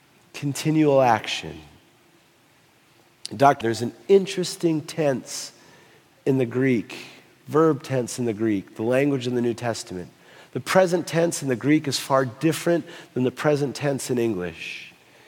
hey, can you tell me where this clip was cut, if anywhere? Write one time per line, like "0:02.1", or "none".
0:03.6